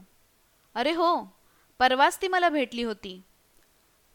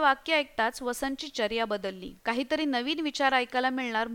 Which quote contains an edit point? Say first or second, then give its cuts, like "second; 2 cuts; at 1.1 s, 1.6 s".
second; 1 cut; at 2.2 s